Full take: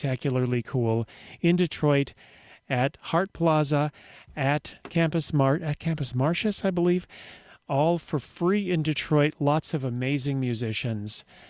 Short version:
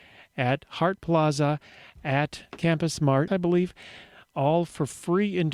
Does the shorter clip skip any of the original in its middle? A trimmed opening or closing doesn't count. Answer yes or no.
yes